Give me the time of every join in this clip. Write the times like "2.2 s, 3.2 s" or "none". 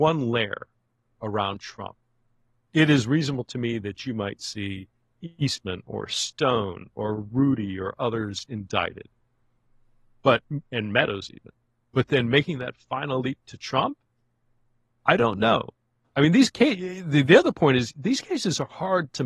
none